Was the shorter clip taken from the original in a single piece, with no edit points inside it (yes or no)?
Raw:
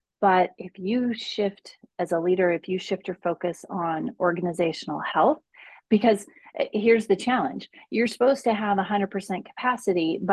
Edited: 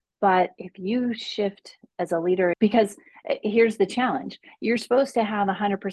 no